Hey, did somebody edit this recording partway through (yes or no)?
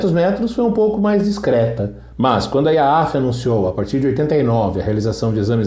yes